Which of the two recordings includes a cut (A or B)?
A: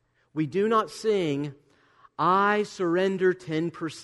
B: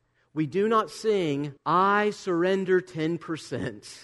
B